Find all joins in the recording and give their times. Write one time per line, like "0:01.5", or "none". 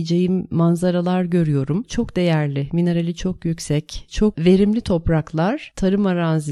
0:01.8